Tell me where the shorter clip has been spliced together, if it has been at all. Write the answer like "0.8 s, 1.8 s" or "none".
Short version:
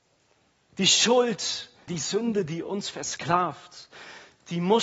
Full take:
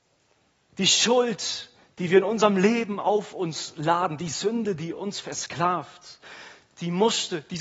1.9 s